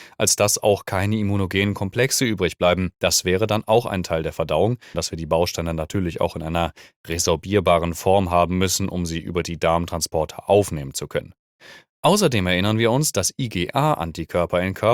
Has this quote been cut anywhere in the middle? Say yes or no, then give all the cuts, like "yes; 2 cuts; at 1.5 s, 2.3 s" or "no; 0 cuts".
yes; 2 cuts; at 2.9 s, 4.9 s